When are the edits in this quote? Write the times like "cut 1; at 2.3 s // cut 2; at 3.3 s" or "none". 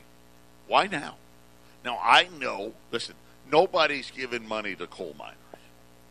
cut 1; at 2.8 s